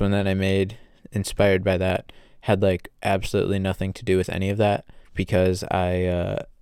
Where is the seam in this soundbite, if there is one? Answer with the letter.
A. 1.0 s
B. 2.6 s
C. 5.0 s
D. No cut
C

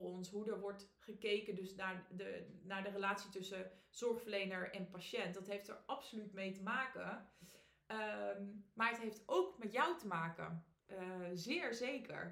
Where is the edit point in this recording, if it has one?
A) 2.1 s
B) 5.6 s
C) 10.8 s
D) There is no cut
C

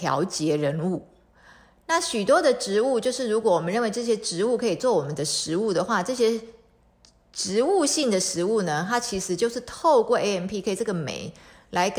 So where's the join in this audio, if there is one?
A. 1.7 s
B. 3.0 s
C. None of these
C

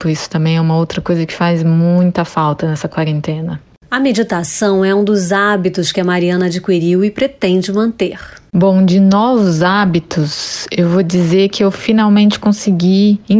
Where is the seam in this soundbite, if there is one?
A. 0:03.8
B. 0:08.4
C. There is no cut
C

